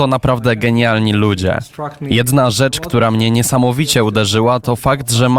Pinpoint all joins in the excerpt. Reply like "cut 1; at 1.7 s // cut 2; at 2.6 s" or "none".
none